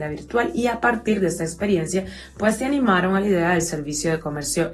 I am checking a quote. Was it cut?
no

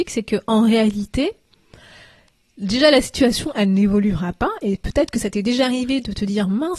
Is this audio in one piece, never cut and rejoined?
yes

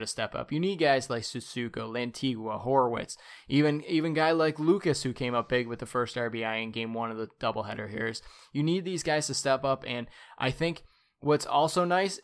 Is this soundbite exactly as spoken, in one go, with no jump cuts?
yes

